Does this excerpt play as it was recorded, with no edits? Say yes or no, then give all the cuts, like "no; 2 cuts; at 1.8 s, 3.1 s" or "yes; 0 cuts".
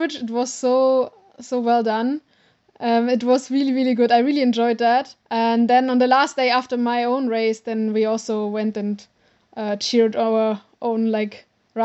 no; 1 cut; at 5.2 s